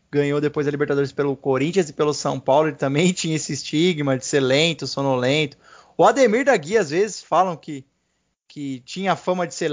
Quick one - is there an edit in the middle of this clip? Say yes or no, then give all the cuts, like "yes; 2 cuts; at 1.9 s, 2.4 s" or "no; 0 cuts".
no; 0 cuts